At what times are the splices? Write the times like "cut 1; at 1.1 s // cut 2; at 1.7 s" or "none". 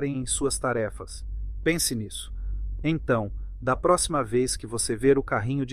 cut 1; at 1.6 s // cut 2; at 2.8 s